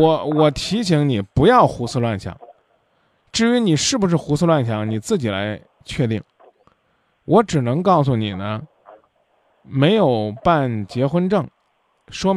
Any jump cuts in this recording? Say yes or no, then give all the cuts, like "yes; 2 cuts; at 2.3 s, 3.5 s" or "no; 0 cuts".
no; 0 cuts